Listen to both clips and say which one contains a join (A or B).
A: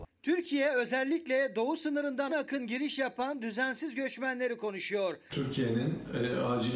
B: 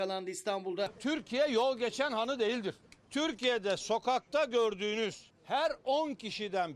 A